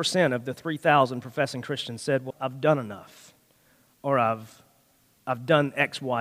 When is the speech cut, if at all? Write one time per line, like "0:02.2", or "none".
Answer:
0:02.3